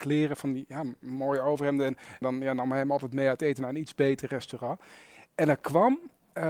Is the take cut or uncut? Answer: cut